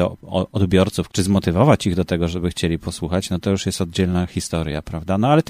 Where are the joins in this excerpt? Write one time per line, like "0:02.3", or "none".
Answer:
0:01.1